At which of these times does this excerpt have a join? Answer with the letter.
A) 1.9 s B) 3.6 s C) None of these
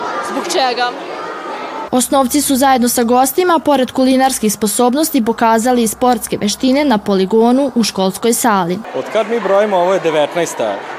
A